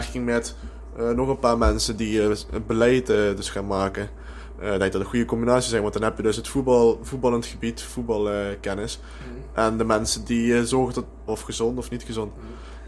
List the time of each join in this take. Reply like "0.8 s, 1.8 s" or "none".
11.3 s